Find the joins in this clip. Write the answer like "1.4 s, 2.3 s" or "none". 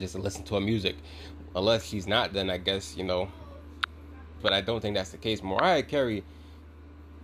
1.5 s, 4.4 s